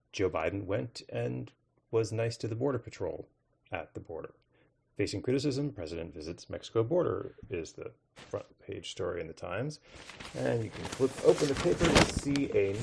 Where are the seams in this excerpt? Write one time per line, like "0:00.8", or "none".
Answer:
none